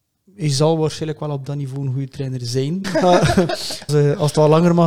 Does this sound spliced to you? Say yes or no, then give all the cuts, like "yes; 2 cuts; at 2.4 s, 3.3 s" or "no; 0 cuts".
yes; 2 cuts; at 2.8 s, 3.9 s